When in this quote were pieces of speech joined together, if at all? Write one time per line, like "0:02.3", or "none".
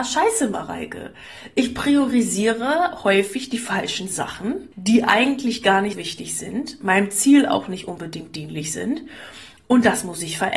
0:04.7
0:05.9